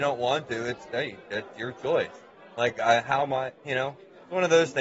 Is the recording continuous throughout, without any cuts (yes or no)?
yes